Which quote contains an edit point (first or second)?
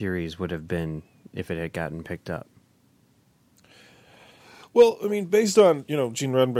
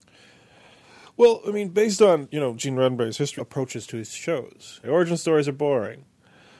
second